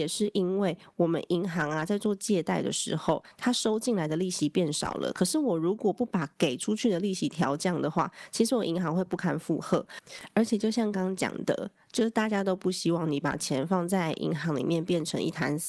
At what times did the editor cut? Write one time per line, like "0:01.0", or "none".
0:10.9